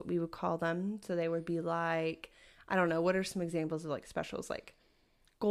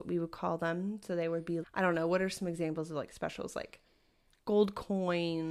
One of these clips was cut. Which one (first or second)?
second